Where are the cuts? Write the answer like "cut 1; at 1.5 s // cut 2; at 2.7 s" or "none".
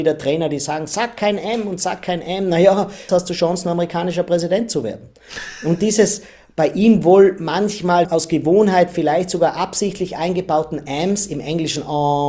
cut 1; at 3.1 s // cut 2; at 8.0 s